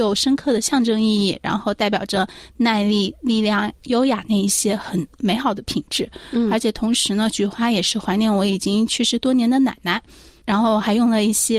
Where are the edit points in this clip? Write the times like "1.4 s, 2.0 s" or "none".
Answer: none